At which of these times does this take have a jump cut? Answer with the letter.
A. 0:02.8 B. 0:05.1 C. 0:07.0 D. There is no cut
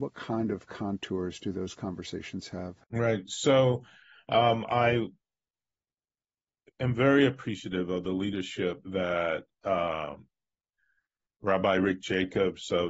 A